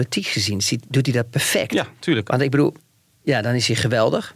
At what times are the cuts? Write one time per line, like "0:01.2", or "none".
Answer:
0:03.1